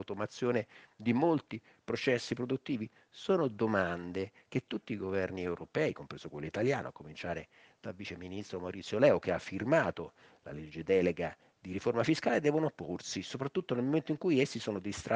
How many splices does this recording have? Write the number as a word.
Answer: zero